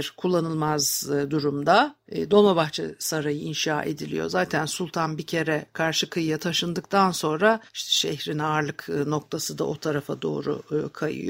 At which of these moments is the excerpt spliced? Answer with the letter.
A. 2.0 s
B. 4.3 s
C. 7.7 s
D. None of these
C